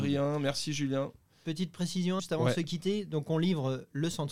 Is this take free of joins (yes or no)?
no